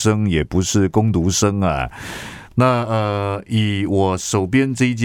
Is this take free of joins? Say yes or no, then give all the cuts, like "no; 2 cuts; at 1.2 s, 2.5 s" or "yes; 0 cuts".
no; 1 cut; at 2.5 s